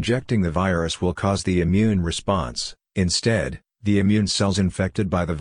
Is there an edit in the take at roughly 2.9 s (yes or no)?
yes